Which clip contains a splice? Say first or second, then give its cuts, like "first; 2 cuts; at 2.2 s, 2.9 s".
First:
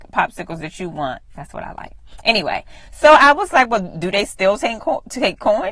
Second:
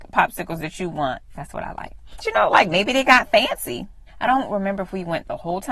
second; 2 cuts; at 2.2 s, 4.1 s